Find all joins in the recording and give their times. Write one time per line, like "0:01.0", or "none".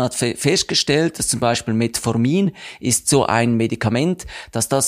none